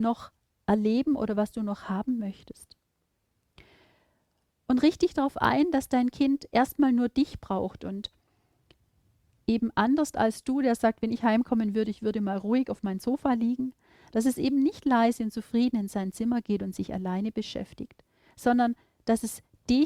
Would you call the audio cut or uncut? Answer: uncut